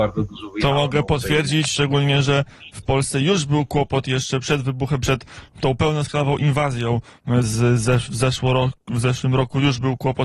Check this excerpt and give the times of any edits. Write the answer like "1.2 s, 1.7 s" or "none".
7.4 s